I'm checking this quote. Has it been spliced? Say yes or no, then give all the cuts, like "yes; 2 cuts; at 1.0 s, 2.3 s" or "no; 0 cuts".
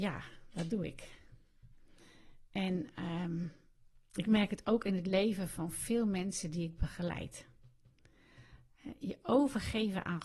no; 0 cuts